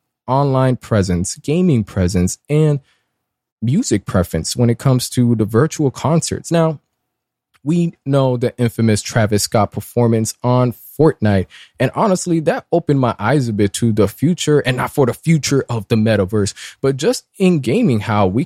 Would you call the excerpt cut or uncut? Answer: uncut